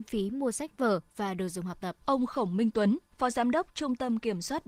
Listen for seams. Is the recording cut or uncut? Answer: cut